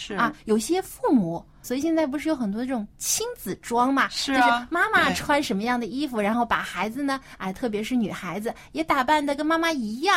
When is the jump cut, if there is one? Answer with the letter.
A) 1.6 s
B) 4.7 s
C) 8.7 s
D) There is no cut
A